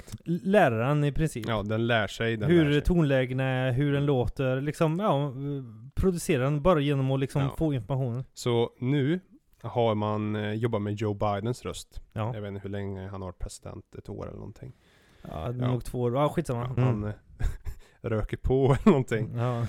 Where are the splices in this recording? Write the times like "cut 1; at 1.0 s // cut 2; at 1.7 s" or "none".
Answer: cut 1; at 16.8 s